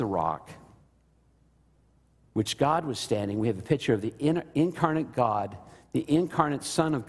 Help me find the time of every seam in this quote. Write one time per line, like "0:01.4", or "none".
none